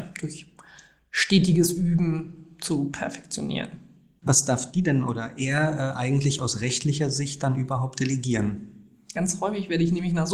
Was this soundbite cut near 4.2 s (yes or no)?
yes